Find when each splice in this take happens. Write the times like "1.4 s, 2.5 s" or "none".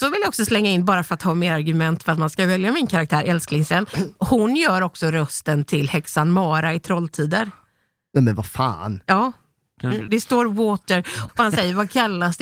10.1 s, 11.3 s